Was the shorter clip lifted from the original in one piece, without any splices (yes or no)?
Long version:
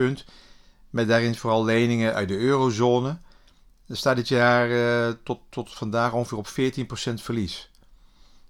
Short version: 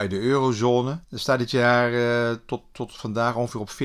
no